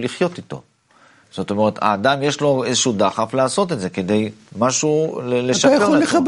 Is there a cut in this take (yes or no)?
yes